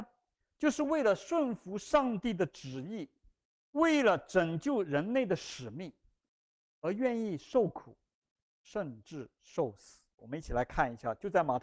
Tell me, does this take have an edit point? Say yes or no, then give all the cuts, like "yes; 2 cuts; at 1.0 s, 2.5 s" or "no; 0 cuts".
yes; 1 cut; at 10.2 s